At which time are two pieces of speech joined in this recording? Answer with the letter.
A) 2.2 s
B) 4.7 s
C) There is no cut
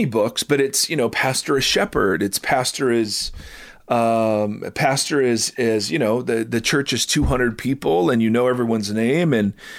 C